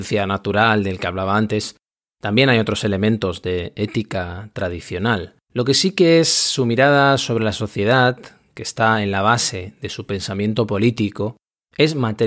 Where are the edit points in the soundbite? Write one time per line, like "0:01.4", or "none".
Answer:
0:05.4